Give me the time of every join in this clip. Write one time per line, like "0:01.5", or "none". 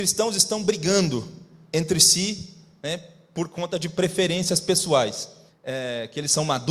0:05.5